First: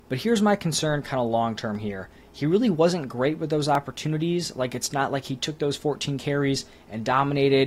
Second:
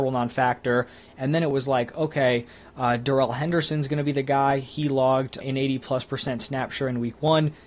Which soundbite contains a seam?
second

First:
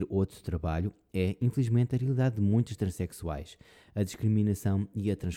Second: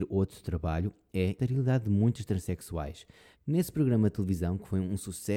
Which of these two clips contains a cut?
second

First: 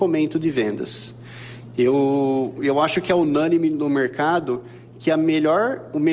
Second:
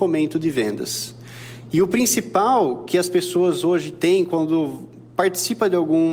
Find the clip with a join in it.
second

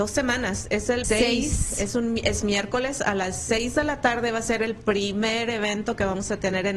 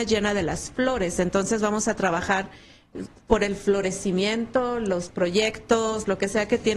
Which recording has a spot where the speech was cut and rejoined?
first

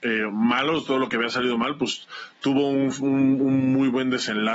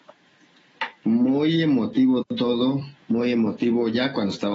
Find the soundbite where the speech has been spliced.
second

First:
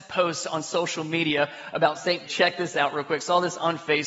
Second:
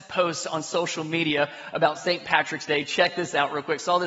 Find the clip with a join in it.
first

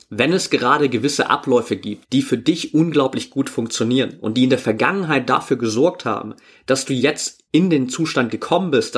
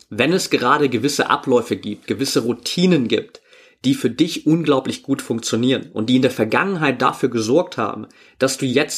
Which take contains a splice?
first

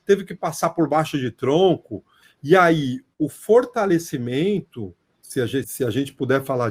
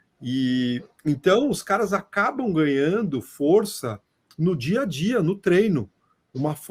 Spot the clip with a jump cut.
first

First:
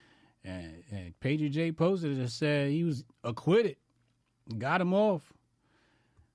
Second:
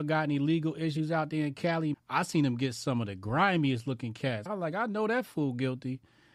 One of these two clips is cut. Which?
second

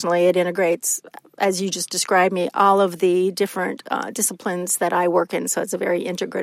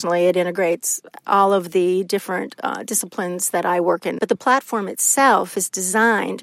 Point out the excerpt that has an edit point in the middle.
second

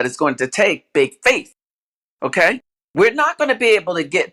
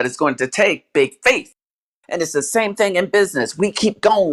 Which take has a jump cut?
second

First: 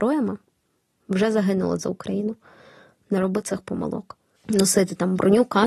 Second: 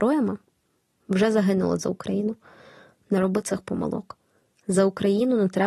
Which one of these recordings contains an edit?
first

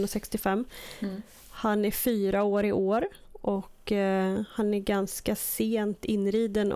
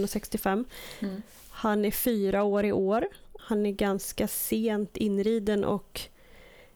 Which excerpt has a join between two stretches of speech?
second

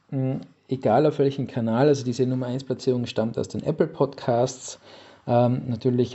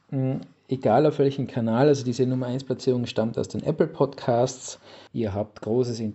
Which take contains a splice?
second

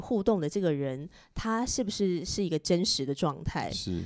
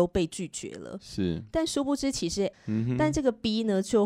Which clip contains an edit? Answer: second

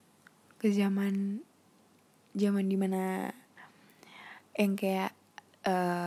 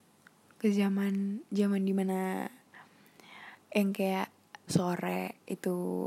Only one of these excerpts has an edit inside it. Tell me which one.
second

